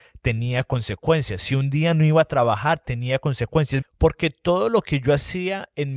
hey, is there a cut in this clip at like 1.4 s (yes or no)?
no